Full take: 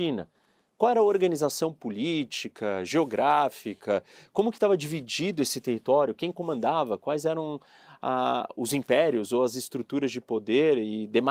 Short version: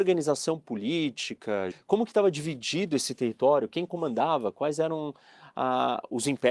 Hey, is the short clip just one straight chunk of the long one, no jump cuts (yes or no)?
no